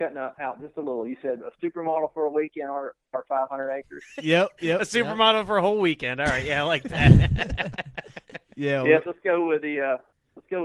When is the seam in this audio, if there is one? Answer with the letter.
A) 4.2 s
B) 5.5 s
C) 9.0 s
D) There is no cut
C